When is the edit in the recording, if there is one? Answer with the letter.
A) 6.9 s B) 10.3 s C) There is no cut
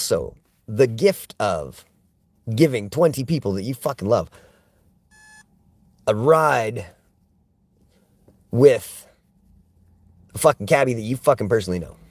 C